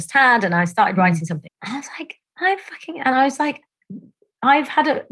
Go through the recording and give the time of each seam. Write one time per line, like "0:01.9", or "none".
0:01.5